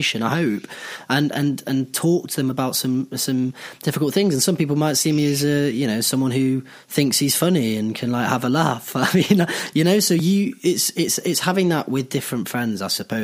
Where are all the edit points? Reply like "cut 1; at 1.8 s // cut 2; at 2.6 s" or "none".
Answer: none